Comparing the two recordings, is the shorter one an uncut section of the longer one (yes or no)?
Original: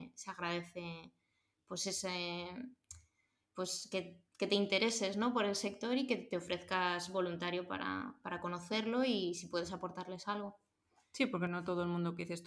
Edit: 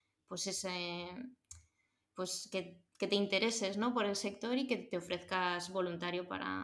yes